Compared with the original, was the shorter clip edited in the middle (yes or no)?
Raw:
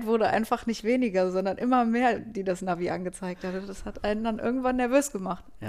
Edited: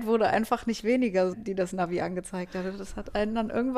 yes